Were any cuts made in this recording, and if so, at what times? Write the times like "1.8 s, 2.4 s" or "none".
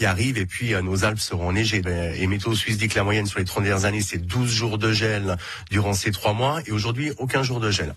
1.8 s